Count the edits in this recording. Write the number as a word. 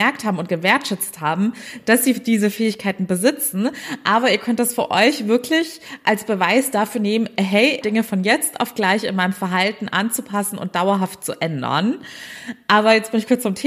one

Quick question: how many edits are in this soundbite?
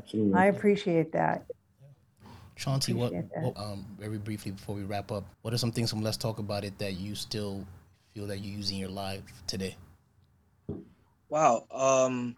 two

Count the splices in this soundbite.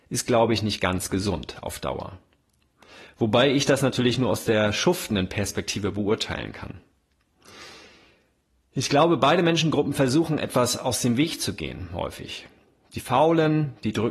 zero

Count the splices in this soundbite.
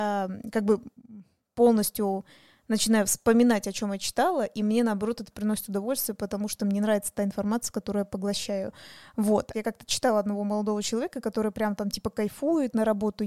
one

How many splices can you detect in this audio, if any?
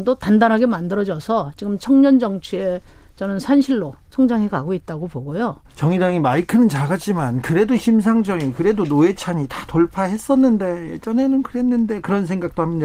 one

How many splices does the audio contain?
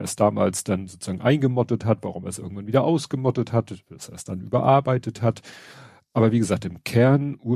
zero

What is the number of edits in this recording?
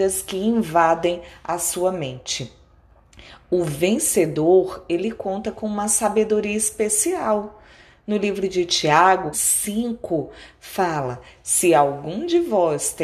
one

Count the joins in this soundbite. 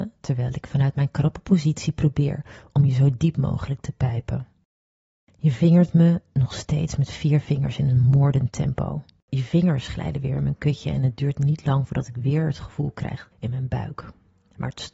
two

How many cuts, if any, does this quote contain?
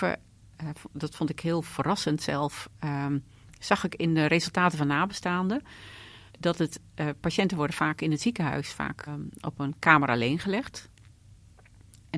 two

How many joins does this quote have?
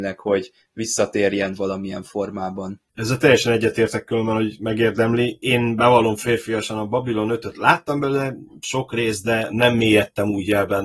one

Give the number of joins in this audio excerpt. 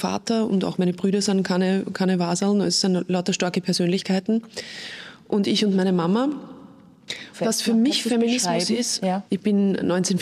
two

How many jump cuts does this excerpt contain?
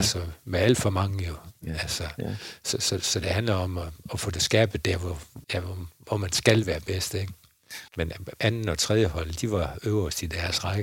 two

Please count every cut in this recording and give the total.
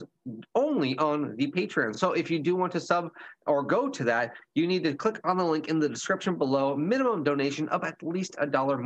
zero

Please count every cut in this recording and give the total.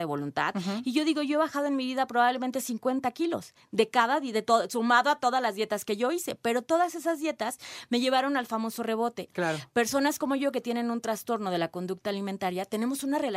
one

